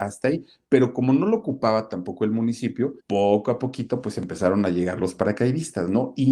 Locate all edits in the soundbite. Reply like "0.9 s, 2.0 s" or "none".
3.0 s